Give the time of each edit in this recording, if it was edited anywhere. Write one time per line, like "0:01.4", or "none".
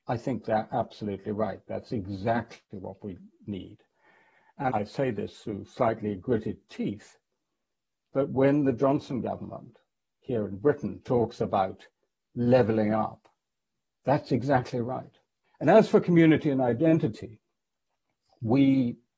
0:04.7
0:15.4